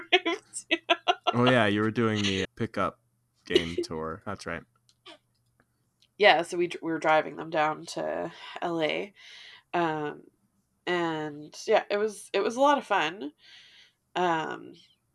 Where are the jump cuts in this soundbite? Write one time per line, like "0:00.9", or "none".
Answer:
0:02.4